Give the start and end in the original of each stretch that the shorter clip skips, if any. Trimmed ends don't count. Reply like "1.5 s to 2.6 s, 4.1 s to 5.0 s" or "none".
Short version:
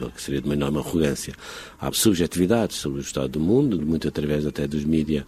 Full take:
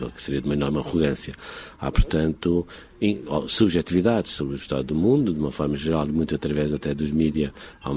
1.9 s to 3.5 s, 5.3 s to 6.1 s